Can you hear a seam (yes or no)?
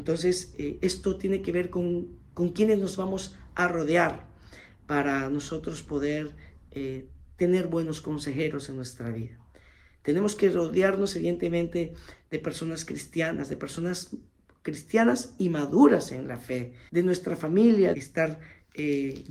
yes